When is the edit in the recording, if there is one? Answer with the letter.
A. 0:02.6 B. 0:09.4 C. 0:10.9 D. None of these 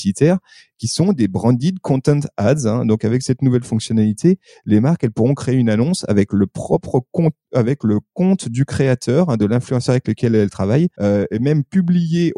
C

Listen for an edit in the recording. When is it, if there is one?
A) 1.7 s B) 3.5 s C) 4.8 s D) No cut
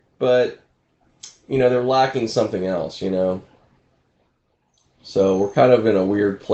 D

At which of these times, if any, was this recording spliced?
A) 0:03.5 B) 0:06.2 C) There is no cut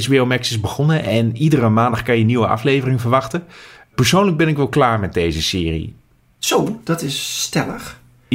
C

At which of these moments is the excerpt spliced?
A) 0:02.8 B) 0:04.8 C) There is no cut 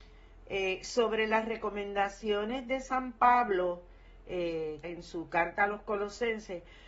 B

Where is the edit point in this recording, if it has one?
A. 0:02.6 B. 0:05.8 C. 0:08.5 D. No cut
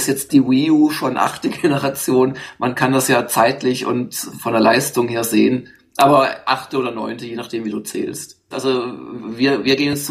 C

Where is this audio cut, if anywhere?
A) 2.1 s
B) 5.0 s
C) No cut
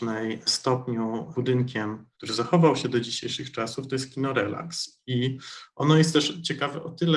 A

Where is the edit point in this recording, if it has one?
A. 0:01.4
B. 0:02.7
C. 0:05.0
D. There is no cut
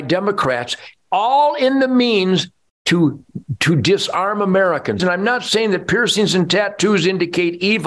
C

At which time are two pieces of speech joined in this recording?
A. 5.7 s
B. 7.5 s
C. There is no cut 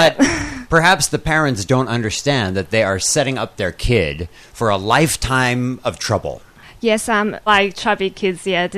B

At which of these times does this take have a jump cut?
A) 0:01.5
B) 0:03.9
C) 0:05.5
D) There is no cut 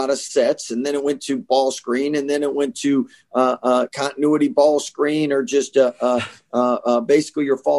D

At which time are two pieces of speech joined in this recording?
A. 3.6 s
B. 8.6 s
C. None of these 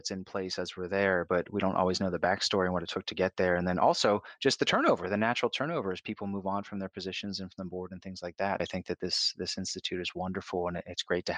B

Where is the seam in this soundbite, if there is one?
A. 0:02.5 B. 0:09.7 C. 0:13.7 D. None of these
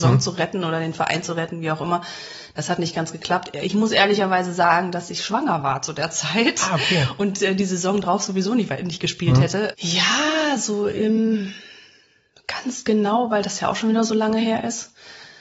B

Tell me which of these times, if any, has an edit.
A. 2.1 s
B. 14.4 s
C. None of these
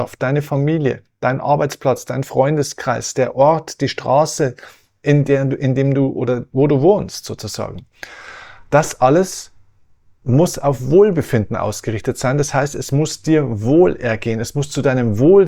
C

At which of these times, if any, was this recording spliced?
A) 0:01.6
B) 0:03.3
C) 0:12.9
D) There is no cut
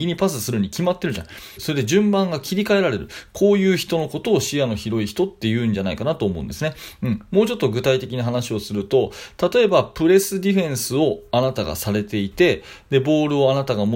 A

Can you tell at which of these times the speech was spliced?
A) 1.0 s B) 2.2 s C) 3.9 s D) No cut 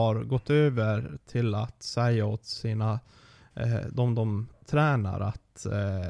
D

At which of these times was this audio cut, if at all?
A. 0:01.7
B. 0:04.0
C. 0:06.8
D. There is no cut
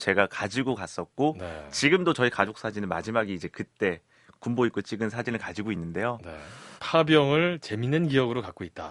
C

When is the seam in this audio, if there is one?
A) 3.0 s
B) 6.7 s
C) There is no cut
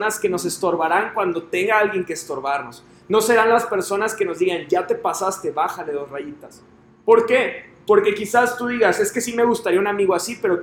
C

